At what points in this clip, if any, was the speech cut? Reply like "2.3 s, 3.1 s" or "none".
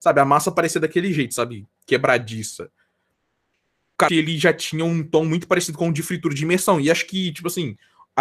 4.1 s